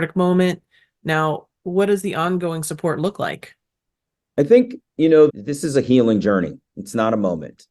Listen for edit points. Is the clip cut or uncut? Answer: cut